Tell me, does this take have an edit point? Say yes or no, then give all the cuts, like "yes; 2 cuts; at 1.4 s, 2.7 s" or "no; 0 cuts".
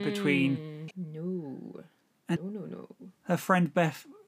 yes; 2 cuts; at 0.9 s, 2.4 s